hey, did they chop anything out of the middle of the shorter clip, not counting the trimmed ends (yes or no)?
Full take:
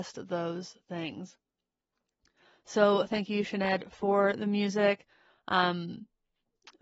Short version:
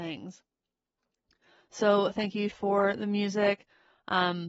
yes